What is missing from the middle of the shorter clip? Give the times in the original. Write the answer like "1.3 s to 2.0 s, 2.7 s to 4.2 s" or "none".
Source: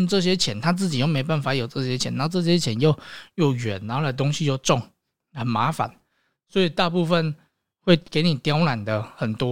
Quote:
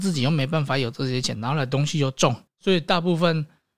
2.1 s to 3.8 s, 4.9 s to 6.4 s